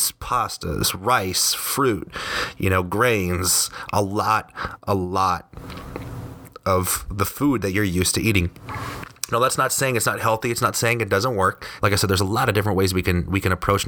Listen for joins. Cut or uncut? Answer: cut